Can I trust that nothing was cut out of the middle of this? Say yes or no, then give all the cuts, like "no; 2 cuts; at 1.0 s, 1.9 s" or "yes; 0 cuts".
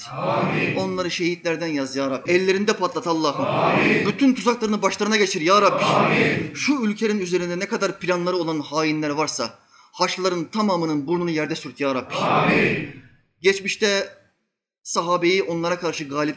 no; 1 cut; at 2.3 s